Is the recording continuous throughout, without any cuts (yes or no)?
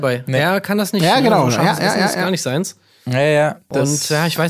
yes